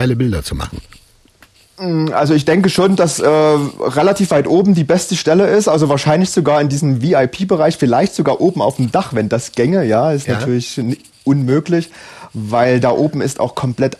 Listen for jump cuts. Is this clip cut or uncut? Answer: uncut